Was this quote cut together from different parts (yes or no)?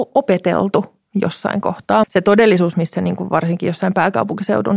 yes